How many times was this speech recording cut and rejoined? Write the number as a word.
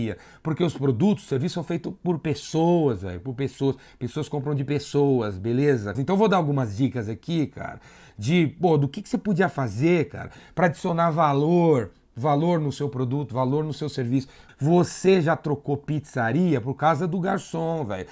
two